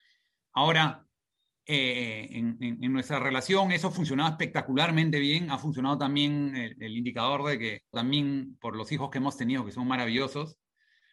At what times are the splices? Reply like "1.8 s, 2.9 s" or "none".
7.9 s